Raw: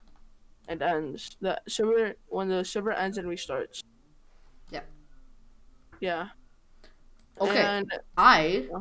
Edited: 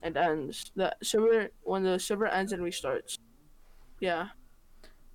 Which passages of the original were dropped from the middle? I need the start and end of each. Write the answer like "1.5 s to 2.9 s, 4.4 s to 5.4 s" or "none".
4.6 s to 6.0 s